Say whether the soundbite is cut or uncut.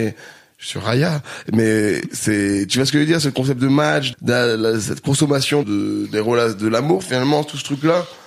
cut